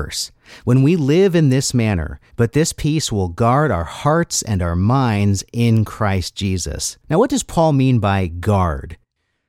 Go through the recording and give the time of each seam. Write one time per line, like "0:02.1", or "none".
0:02.3
0:07.0